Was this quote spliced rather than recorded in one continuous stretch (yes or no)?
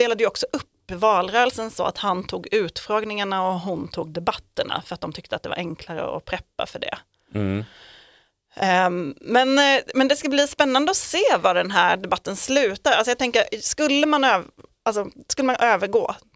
no